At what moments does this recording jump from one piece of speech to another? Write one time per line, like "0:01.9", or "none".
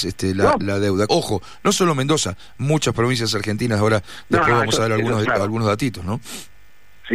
0:01.1
0:05.2